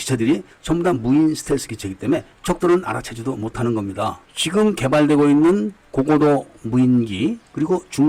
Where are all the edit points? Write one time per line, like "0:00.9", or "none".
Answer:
0:04.2

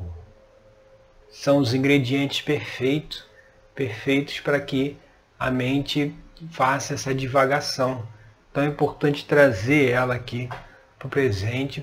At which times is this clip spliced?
none

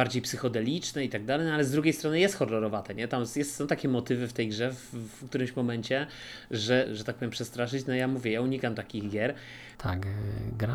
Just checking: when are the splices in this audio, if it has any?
0:06.9
0:09.7

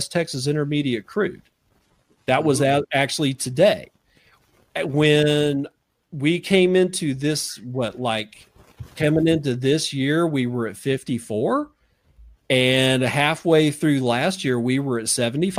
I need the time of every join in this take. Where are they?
none

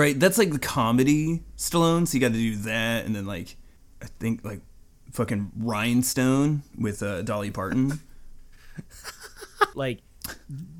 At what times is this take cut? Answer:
0:09.7

